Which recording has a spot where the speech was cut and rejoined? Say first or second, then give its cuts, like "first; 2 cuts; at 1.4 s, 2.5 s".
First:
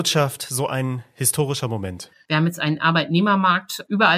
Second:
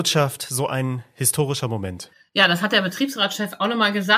first; 1 cut; at 2.3 s